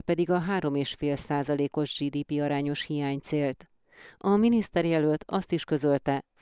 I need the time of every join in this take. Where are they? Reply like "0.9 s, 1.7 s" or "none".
none